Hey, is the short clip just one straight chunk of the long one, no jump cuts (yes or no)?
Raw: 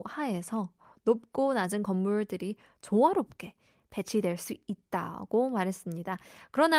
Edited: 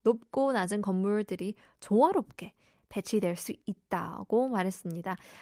yes